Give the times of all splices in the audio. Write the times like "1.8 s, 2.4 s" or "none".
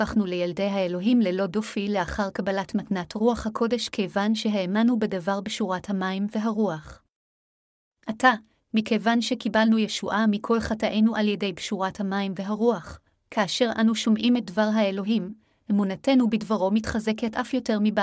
13.1 s